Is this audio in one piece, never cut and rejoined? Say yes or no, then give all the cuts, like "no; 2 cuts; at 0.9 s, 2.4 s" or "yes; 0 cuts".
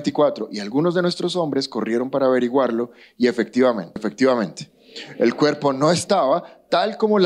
no; 1 cut; at 4.0 s